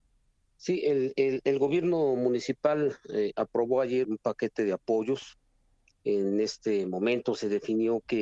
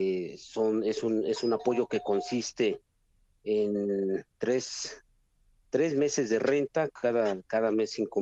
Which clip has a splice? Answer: first; 1 cut; at 4.0 s

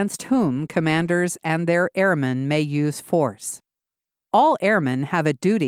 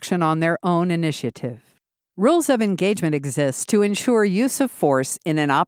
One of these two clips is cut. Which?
second; 1 cut; at 2.0 s

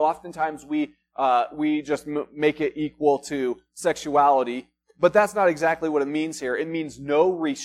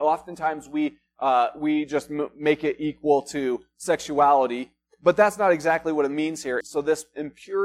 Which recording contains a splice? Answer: second; 1 cut; at 6.6 s

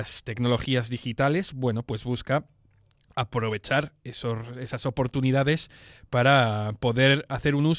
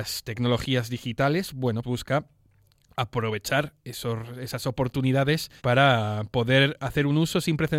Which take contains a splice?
second; 2 cuts; at 1.8 s, 5.6 s

